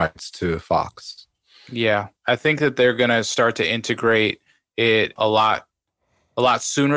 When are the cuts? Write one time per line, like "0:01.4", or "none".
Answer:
0:02.2
0:05.2